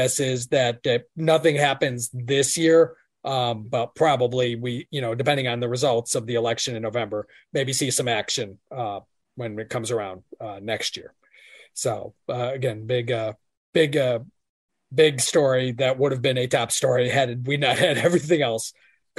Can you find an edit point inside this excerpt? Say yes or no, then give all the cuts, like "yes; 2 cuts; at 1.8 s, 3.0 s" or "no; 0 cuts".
no; 0 cuts